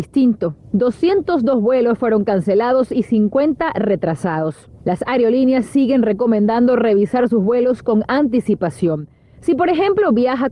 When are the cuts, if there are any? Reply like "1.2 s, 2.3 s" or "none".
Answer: none